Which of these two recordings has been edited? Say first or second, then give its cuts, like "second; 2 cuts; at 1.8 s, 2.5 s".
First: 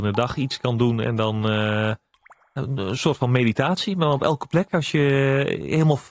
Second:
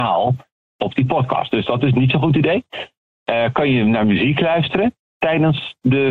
first; 1 cut; at 4.7 s